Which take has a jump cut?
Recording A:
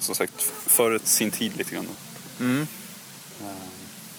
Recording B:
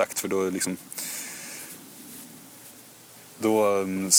A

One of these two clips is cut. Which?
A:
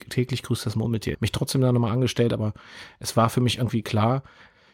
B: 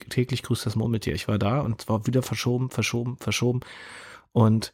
A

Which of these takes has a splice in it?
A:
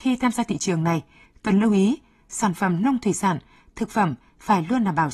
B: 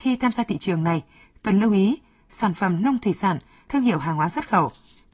B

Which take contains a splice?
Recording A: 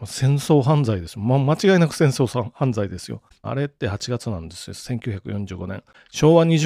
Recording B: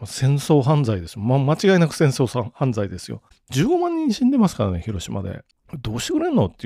A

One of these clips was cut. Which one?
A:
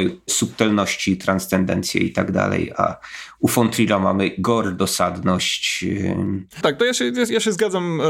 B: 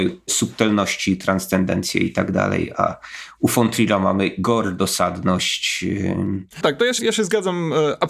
B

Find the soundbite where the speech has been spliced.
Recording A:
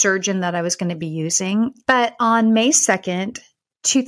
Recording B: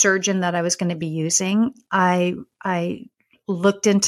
A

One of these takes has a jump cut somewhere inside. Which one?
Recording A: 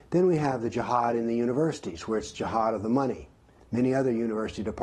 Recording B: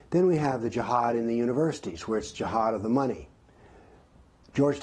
A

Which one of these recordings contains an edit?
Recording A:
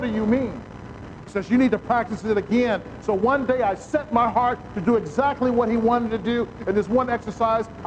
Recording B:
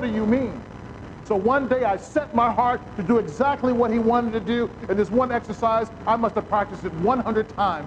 B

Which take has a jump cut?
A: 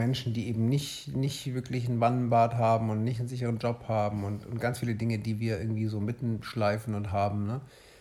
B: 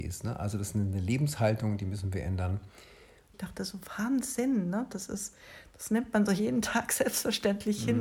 B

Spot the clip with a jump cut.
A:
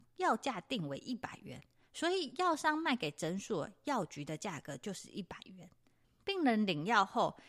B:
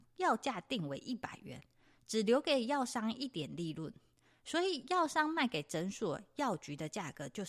A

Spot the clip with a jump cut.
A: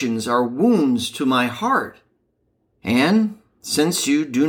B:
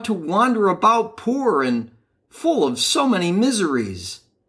A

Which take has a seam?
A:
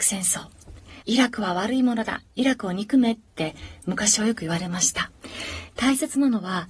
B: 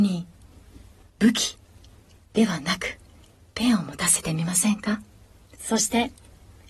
A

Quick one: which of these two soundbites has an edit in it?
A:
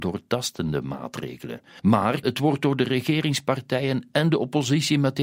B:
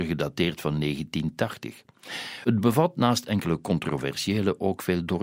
A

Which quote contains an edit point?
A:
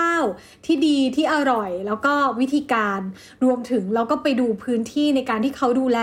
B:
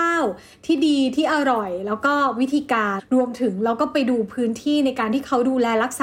B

